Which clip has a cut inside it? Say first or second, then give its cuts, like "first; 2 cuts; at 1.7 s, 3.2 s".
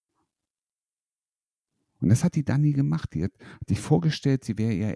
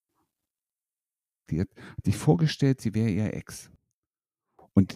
second; 1 cut; at 1.5 s